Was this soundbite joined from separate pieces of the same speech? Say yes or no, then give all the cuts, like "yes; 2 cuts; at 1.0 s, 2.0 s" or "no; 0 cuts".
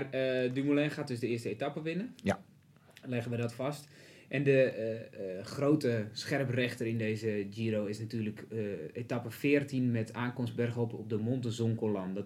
no; 0 cuts